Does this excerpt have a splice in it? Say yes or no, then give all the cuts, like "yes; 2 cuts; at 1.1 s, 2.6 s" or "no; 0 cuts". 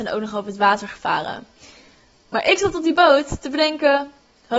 no; 0 cuts